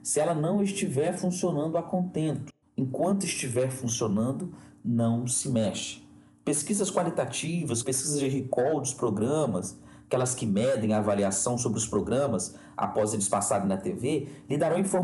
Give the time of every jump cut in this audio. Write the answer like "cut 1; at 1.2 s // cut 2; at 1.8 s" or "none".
cut 1; at 7.8 s